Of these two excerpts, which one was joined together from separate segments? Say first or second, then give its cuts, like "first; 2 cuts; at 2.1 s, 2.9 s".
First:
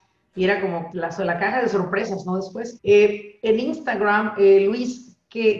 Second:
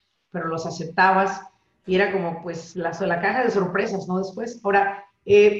first; 2 cuts; at 0.9 s, 2.8 s